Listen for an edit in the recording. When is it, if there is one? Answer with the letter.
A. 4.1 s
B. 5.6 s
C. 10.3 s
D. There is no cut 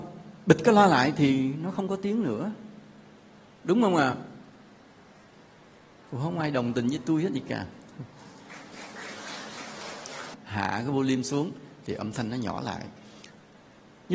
C